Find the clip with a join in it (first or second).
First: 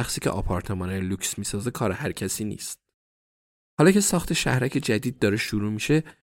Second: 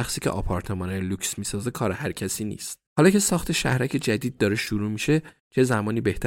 second